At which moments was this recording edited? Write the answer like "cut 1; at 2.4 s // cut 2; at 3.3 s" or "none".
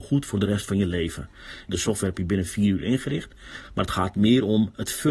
cut 1; at 1.7 s